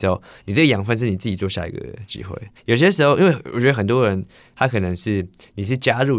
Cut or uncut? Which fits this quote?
cut